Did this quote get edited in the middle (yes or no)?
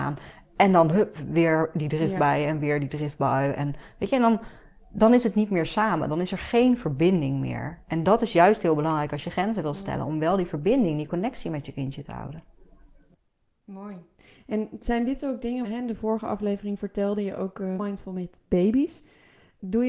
yes